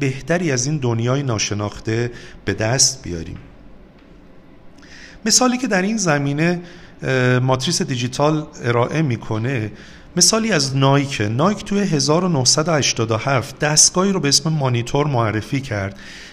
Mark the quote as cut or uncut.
uncut